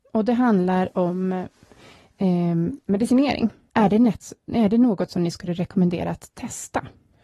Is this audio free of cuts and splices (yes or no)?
no